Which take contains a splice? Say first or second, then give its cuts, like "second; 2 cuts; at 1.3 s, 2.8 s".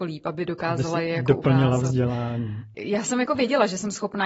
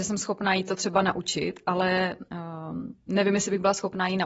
first; 1 cut; at 2.7 s